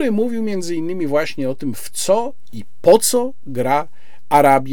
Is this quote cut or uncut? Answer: uncut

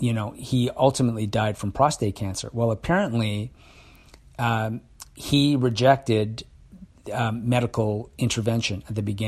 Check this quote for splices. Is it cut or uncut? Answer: uncut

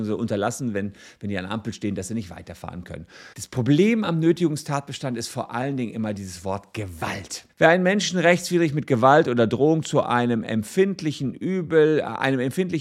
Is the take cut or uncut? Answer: cut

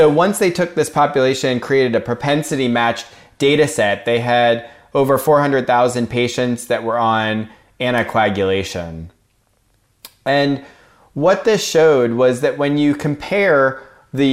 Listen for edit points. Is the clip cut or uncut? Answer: uncut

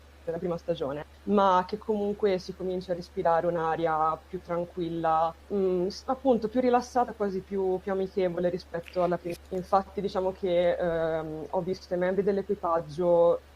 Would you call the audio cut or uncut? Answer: cut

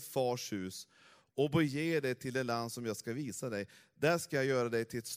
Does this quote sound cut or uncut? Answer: uncut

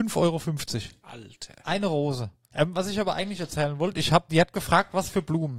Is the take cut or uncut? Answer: cut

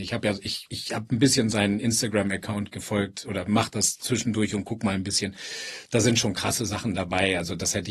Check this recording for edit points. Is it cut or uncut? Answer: uncut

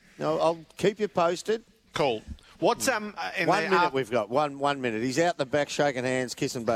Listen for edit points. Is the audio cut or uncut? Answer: uncut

